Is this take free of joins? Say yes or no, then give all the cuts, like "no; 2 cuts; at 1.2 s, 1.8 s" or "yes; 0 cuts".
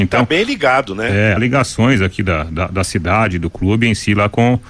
no; 1 cut; at 1.4 s